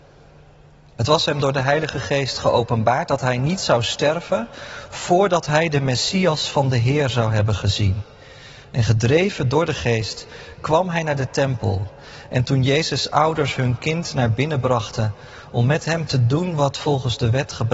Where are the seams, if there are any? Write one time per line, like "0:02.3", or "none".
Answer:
none